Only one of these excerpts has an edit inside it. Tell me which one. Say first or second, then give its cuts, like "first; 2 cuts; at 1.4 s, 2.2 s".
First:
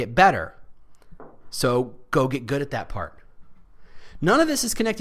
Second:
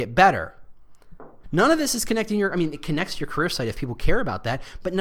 second; 1 cut; at 1.4 s